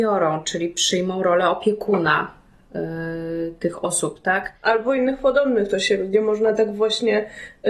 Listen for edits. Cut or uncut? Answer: uncut